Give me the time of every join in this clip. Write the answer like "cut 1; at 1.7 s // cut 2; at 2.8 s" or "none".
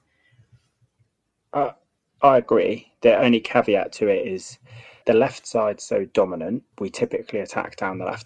cut 1; at 5.0 s // cut 2; at 6.7 s